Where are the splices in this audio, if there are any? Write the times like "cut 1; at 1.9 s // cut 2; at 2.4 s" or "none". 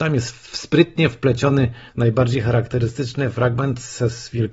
cut 1; at 1.9 s